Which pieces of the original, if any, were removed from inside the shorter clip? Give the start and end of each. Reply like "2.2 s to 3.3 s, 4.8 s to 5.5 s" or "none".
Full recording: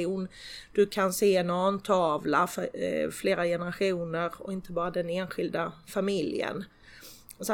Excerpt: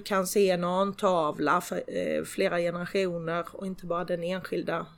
none

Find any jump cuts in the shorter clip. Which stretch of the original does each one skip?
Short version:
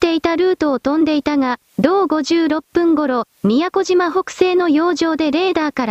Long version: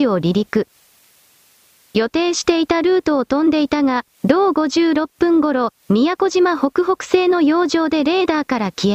6.6 s to 6.8 s

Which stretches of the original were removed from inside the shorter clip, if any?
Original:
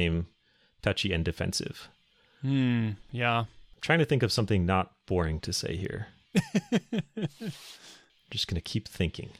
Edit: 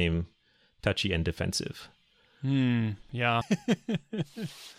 3.4 s to 6.4 s

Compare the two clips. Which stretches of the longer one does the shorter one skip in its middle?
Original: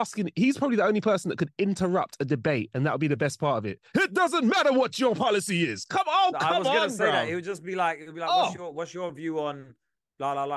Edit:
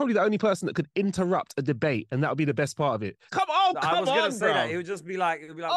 3.9 s to 5.9 s

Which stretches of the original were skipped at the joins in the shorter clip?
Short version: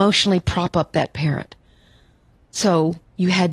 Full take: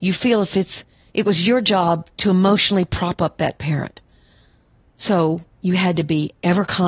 none

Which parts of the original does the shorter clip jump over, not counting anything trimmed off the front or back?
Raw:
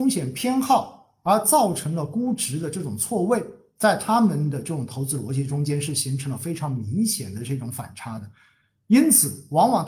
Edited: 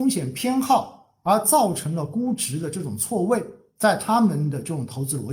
none

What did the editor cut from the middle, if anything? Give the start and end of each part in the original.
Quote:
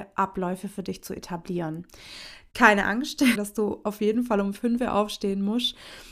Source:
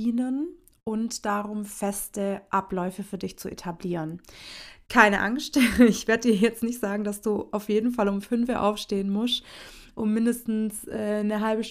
5.7 s to 7.0 s

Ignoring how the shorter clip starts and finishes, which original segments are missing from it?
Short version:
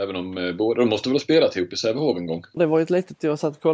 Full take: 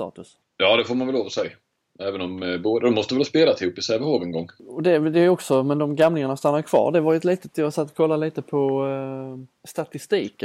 4.6 s to 6.9 s

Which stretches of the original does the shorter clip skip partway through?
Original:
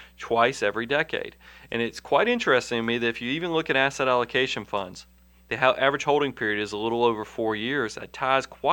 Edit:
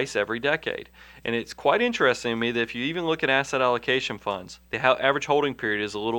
5.1 s to 5.4 s

